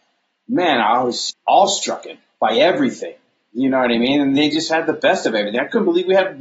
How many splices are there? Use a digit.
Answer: 1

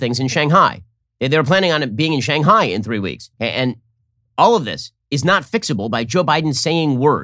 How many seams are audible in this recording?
2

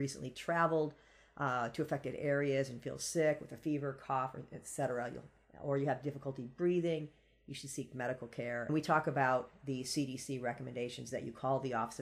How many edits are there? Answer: 0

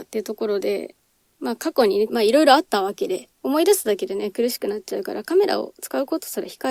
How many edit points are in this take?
1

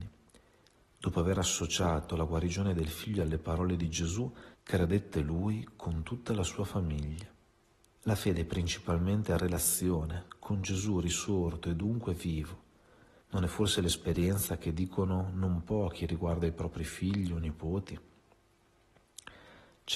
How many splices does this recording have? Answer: 3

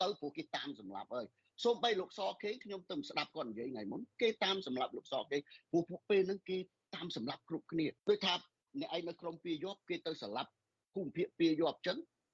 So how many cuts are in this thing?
1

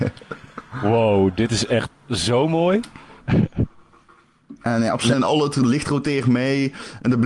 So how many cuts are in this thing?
2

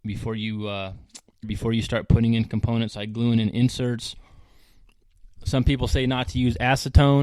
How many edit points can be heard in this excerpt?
1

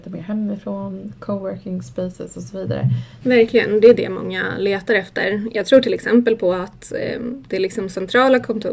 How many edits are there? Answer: 1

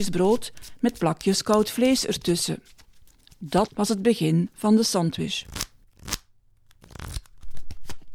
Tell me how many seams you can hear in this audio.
1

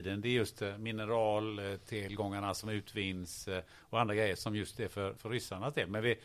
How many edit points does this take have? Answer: 1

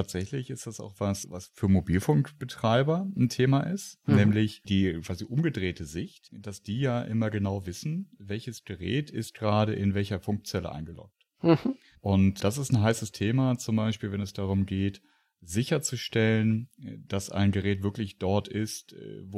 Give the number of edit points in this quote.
1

